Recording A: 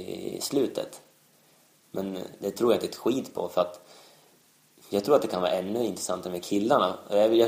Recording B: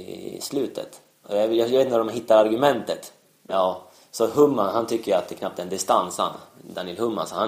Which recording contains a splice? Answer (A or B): B